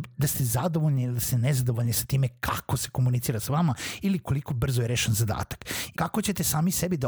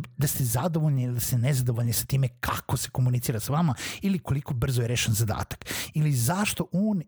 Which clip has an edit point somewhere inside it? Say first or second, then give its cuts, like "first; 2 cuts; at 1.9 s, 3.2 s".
first; 1 cut; at 5.9 s